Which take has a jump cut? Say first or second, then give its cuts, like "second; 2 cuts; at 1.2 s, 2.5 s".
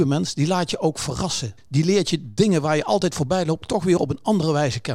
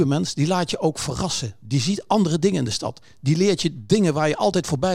first; 1 cut; at 1.6 s